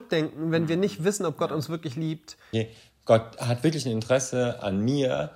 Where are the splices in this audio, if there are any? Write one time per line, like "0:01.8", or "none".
0:02.5